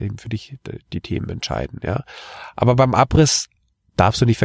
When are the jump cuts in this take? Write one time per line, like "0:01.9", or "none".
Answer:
none